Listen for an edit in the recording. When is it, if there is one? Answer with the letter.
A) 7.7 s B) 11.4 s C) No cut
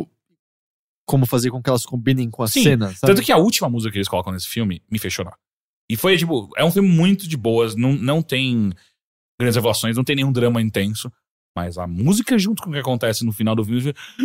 C